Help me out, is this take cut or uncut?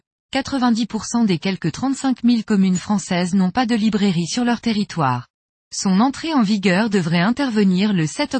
cut